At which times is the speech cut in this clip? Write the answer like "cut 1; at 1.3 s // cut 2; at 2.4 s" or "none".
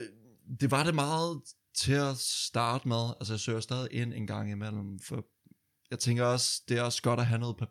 none